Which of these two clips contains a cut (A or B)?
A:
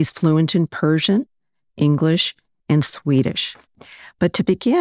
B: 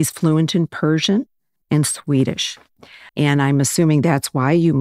B